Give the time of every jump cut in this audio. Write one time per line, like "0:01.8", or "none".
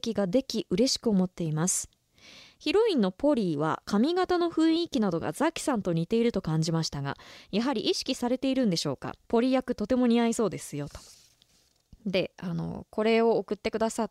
0:09.2